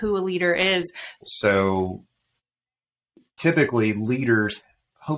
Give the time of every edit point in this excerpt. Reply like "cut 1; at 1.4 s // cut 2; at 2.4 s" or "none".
cut 1; at 1.2 s